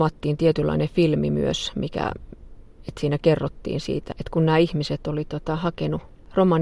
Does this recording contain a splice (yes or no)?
yes